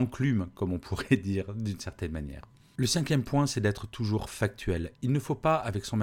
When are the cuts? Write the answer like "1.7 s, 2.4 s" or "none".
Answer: none